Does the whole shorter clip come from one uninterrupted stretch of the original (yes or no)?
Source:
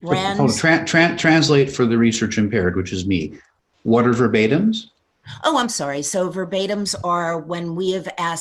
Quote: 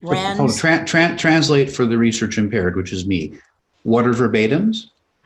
yes